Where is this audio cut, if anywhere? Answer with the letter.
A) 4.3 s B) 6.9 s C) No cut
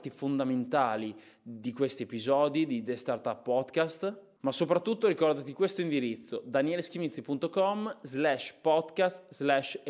C